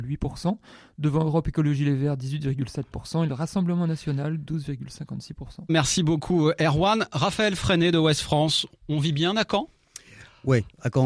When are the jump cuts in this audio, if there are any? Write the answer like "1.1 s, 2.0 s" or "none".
5.7 s

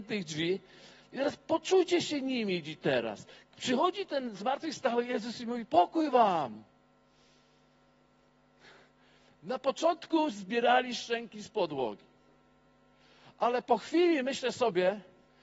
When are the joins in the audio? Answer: none

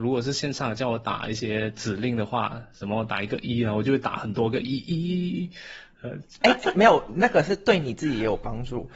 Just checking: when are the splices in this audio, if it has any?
6.4 s

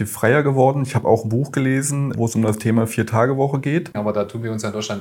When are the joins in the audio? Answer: 2.1 s, 3.9 s

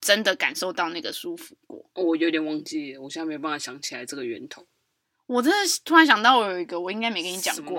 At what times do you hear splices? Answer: 2.0 s

